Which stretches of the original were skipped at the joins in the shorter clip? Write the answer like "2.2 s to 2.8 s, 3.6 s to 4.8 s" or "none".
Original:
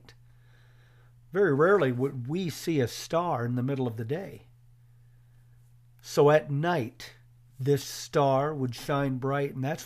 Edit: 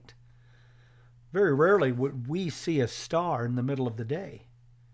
none